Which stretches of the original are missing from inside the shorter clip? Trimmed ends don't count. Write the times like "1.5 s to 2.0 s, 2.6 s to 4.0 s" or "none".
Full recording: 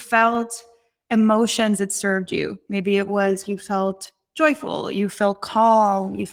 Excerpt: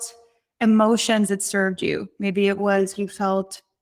none